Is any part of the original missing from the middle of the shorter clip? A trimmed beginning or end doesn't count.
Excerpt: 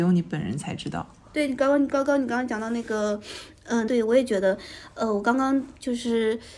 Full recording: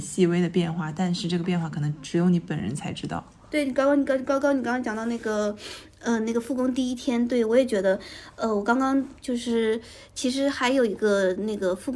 yes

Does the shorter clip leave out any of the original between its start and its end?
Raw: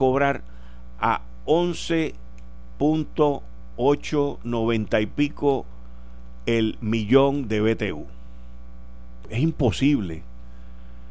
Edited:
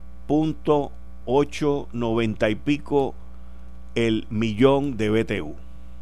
no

